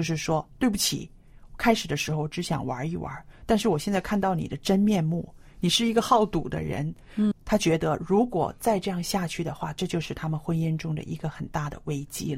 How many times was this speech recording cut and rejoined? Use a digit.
1